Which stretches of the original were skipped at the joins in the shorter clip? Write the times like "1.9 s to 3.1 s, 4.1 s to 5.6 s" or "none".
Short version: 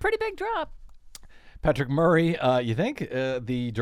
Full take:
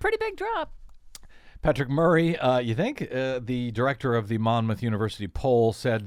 none